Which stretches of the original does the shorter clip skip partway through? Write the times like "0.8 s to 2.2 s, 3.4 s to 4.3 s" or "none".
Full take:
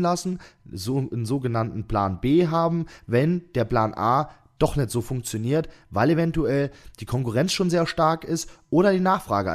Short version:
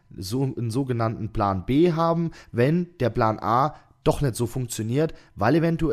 none

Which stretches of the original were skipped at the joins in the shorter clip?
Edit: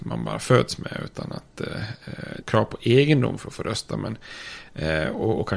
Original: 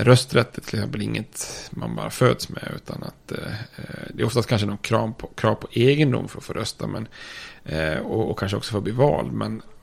4.1 s to 5.3 s

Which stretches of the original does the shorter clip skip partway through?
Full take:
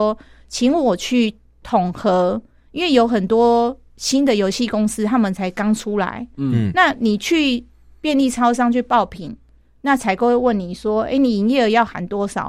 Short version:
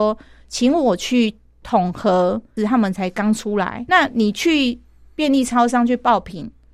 2.6 s to 5.0 s, 6.3 s to 6.7 s

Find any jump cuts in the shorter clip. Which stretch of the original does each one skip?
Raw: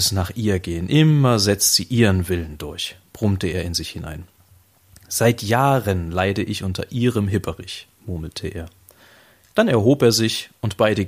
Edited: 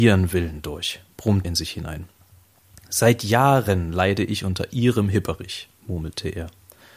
3.4 s to 3.6 s

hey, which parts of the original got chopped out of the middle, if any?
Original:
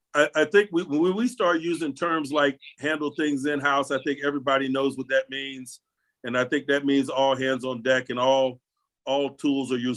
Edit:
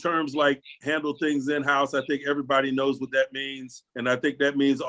5.9 s to 6.2 s

